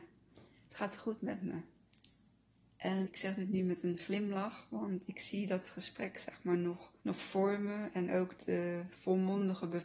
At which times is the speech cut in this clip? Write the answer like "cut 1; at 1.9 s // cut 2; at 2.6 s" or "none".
cut 1; at 3.0 s // cut 2; at 7.0 s // cut 3; at 8.4 s

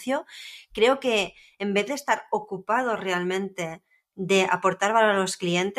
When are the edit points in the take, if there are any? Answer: none

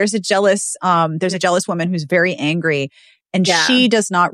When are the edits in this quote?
none

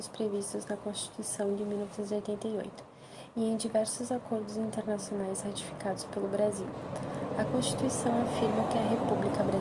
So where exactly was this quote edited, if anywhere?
none

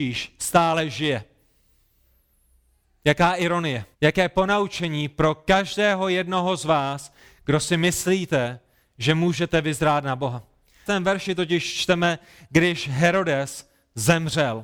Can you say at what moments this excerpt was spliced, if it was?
cut 1; at 3.9 s // cut 2; at 10.9 s

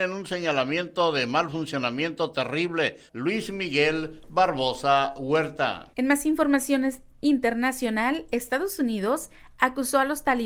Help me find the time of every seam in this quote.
cut 1; at 3.1 s // cut 2; at 5.9 s

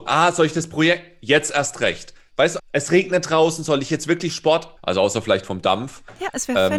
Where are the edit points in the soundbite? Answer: cut 1; at 2.6 s // cut 2; at 4.8 s

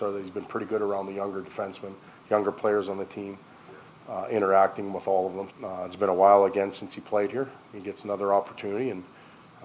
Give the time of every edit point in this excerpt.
cut 1; at 5.5 s

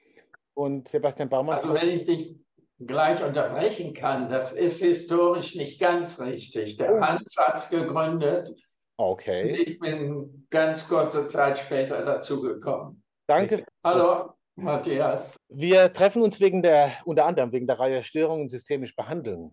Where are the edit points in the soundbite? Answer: cut 1; at 13.6 s // cut 2; at 15.3 s

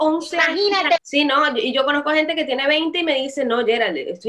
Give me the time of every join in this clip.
cut 1; at 1.0 s

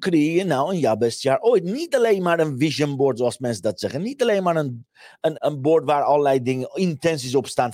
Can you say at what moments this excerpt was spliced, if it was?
cut 1; at 5.4 s

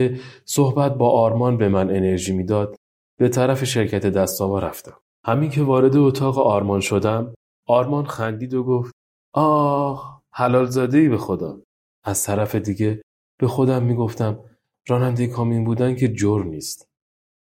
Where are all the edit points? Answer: cut 1; at 11.8 s

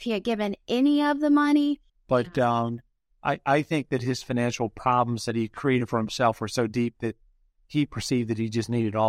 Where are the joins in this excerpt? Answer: cut 1; at 1.9 s

